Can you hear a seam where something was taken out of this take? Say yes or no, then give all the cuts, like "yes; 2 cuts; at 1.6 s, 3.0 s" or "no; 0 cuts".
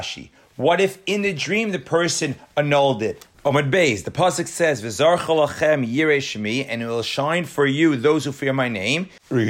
no; 0 cuts